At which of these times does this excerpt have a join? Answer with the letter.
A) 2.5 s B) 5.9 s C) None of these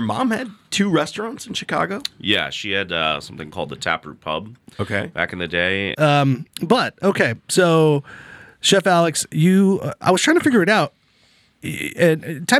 B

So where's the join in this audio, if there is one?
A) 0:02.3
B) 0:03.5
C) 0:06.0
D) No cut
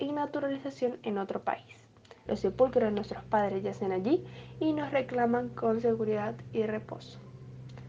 A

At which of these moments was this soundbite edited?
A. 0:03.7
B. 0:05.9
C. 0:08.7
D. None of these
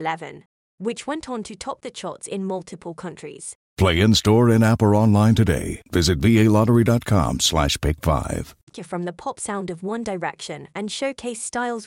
A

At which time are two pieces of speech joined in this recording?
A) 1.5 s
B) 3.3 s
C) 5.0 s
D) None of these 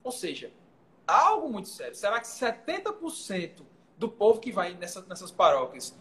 D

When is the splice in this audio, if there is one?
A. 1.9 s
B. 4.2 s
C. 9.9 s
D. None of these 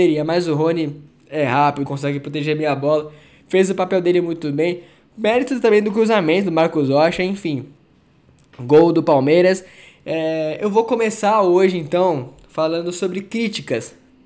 A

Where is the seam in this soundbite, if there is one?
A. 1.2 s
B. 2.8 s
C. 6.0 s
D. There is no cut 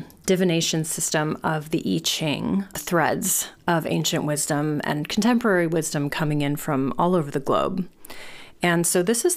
B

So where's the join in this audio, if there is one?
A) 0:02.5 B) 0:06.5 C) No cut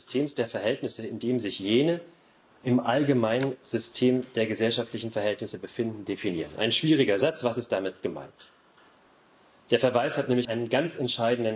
C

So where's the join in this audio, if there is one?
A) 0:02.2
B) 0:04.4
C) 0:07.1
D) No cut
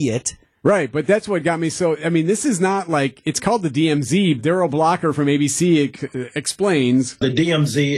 B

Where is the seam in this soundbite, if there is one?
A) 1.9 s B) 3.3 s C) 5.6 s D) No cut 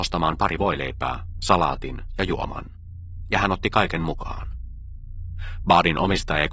C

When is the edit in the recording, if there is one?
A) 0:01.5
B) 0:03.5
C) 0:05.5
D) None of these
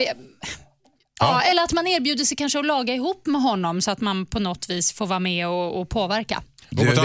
A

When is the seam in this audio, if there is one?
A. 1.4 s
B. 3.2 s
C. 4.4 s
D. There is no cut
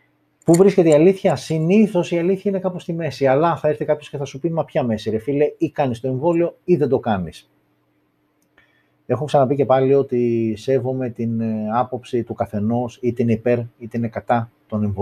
D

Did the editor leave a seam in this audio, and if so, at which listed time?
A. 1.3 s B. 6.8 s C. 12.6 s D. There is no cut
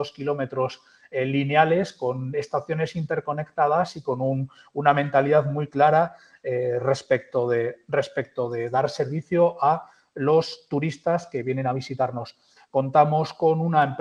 C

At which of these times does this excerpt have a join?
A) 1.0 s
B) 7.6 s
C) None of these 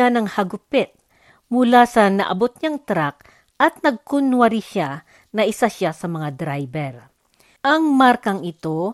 B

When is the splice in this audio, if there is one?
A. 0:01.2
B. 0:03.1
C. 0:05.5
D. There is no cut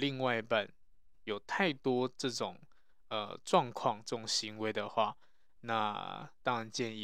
A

